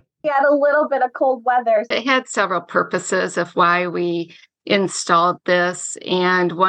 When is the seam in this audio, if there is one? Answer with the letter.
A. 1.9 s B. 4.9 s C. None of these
A